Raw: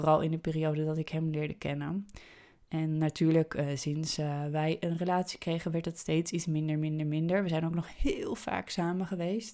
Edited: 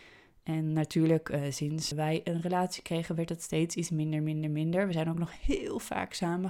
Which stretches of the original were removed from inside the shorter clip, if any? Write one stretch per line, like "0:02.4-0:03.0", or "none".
0:04.2-0:04.5